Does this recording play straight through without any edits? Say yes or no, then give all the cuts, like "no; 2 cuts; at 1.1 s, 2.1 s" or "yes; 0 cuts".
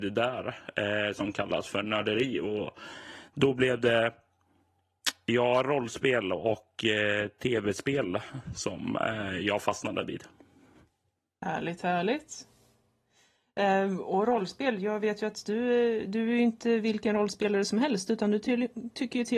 yes; 0 cuts